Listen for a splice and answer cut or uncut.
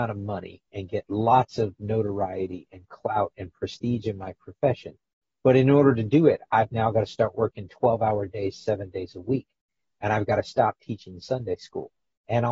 uncut